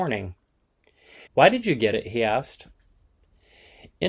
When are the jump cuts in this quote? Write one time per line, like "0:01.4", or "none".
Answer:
0:01.3